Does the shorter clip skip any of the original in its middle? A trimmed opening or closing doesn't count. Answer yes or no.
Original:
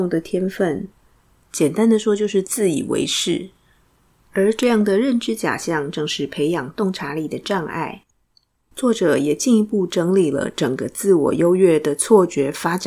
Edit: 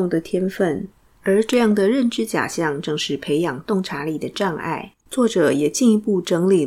yes